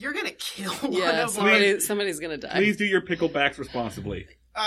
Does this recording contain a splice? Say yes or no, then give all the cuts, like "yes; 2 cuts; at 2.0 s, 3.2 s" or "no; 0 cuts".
no; 0 cuts